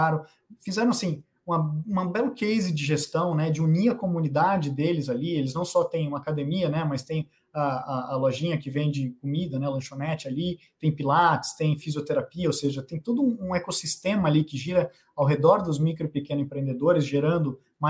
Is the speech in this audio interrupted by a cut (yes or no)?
no